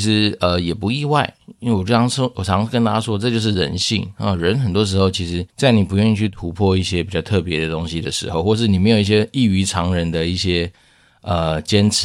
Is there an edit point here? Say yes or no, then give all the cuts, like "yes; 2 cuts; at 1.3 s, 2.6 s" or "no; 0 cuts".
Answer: yes; 1 cut; at 5.5 s